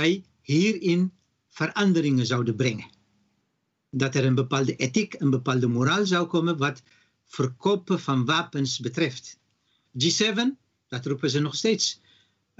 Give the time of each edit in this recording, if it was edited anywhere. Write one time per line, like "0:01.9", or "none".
0:09.8